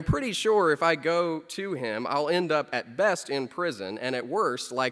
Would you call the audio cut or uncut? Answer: uncut